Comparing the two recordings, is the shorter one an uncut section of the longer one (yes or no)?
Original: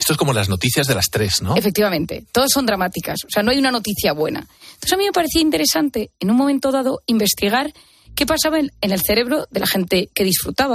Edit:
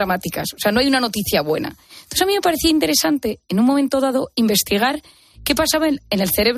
yes